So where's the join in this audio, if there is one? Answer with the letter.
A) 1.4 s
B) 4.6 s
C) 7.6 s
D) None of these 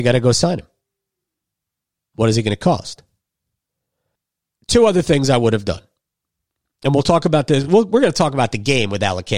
D